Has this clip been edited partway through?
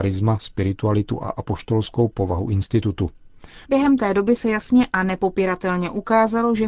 yes; 1 cut; at 3.6 s

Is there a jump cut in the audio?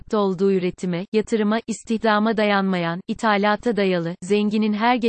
no; 0 cuts

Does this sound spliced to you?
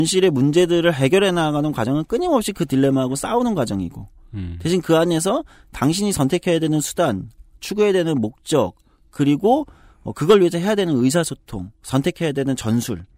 yes; 1 cut; at 11.7 s

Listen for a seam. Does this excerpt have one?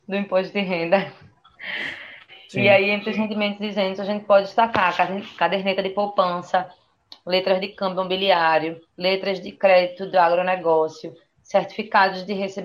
no; 0 cuts

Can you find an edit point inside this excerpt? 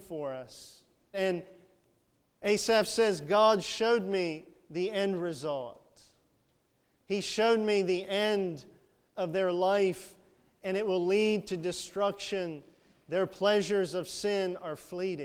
yes; 1 cut; at 1.1 s

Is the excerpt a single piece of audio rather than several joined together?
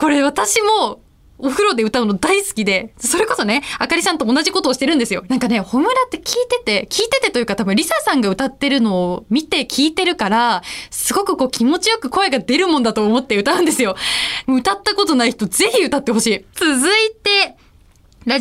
no; 2 cuts; at 5.3 s, 14.4 s

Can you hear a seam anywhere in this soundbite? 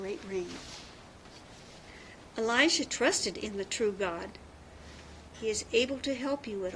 yes; 1 cut; at 5.3 s

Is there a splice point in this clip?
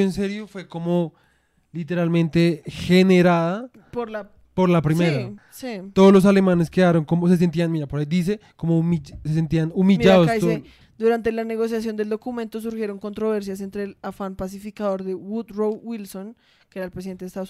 yes; 2 cuts; at 5.4 s, 10.8 s

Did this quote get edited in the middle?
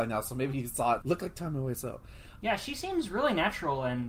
yes; 2 cuts; at 1.0 s, 2.4 s

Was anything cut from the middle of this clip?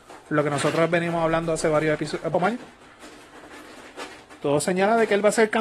yes; 1 cut; at 2.3 s

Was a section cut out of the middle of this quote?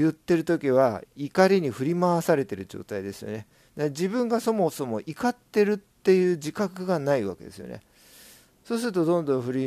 no; 0 cuts

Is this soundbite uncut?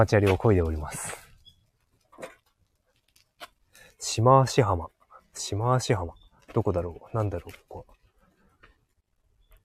yes; 0 cuts

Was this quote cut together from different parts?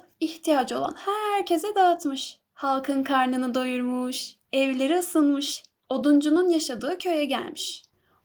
no; 0 cuts

